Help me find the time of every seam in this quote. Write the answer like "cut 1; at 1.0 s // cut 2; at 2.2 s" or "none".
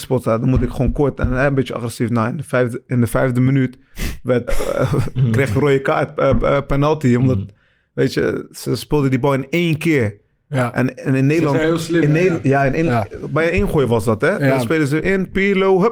cut 1; at 4.5 s